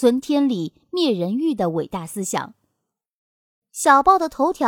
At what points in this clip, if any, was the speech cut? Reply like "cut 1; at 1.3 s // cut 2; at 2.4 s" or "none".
cut 1; at 3.6 s